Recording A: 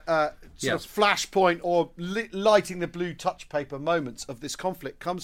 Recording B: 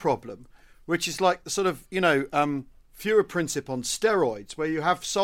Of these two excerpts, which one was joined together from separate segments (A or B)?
A